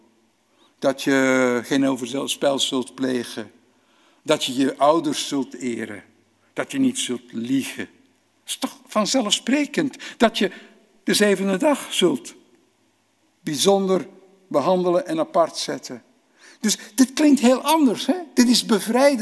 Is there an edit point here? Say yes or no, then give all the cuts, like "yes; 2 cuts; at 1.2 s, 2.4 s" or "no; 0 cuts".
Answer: no; 0 cuts